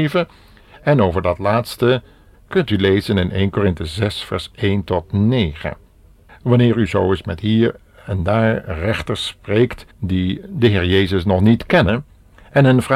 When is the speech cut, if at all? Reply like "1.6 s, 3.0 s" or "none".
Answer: 2.3 s, 6.3 s, 9.9 s